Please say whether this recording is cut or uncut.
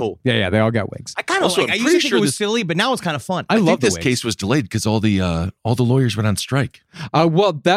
uncut